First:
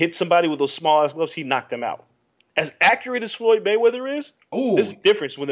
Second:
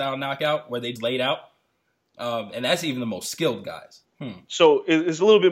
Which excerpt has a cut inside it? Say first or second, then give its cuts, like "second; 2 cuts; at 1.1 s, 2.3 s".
second; 2 cuts; at 1.0 s, 4.0 s